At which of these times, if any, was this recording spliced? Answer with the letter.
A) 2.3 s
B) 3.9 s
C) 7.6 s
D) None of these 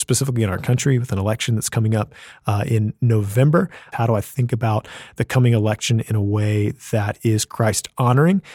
B